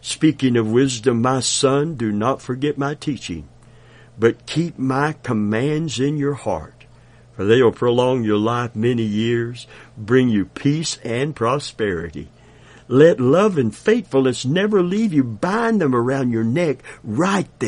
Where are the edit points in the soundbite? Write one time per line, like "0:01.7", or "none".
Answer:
none